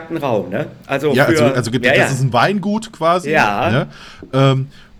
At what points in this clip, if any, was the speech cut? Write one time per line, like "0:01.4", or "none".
none